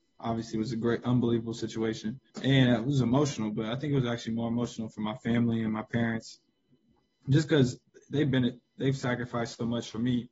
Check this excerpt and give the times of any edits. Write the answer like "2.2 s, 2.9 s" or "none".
2.3 s